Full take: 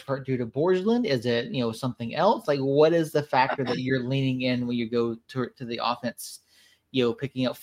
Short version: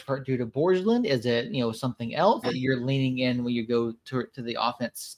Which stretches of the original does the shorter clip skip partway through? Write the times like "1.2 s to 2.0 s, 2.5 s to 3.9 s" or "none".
2.4 s to 3.7 s